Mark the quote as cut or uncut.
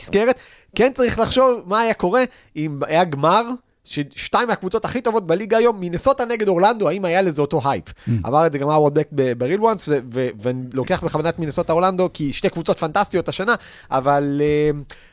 uncut